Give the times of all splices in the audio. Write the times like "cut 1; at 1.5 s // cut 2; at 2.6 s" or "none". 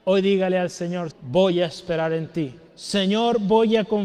cut 1; at 1.1 s // cut 2; at 2.7 s